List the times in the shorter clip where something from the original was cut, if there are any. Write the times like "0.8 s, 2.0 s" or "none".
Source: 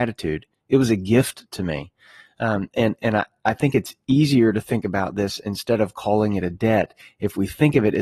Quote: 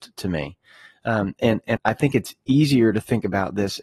1.8 s

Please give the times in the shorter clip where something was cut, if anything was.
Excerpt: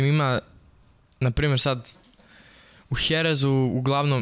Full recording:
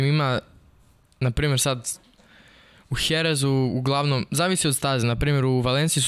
none

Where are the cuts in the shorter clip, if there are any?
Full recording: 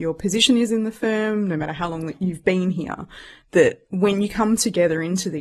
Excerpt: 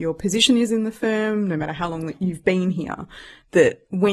none

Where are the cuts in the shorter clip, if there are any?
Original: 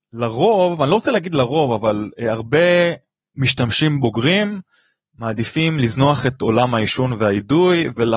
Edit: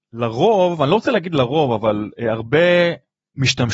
none

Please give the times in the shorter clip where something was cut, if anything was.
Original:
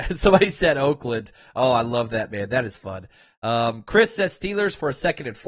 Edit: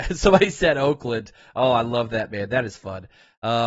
none

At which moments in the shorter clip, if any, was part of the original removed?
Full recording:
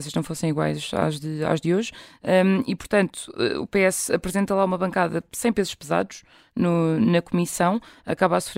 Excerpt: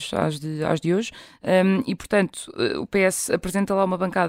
none

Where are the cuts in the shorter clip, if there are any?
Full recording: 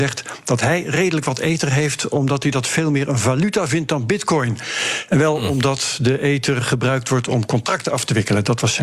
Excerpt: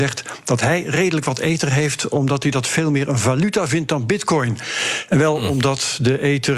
none

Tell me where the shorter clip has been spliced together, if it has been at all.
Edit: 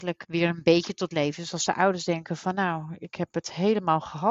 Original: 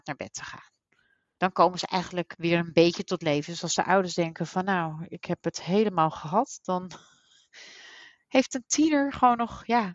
none

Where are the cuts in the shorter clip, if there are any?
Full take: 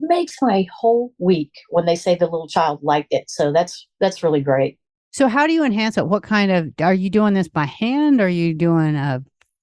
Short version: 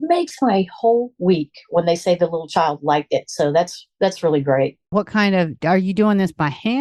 4.9 s

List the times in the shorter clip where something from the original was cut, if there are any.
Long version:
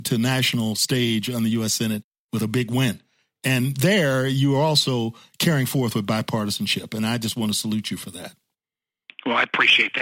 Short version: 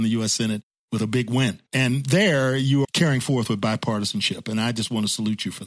1.7 s, 2.8 s

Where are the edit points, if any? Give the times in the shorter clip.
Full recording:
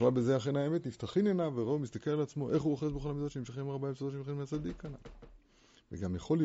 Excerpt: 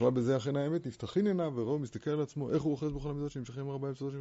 none

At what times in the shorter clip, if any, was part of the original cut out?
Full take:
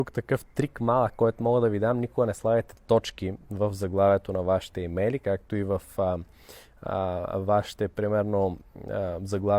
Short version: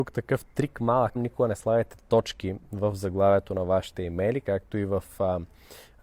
1.2 s

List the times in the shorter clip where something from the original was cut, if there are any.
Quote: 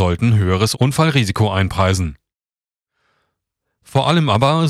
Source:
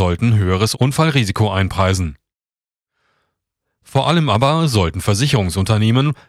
none

